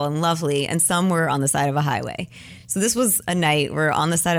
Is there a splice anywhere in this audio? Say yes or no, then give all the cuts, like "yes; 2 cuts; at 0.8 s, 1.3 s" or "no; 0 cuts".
no; 0 cuts